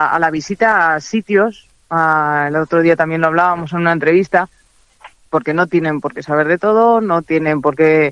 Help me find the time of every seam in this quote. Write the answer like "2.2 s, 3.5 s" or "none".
5.1 s